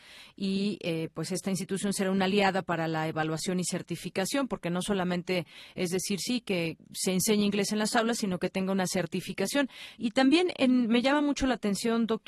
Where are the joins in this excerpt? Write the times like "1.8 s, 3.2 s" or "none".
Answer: 6.8 s, 10.0 s